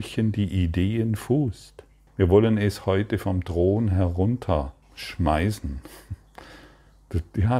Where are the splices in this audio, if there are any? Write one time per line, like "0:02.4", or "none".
0:02.1
0:04.8